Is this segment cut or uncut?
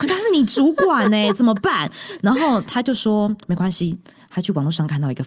uncut